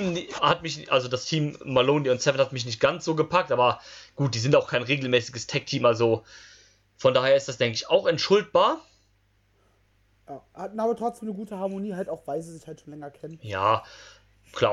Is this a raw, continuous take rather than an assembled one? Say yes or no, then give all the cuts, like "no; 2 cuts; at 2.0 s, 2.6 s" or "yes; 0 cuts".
yes; 0 cuts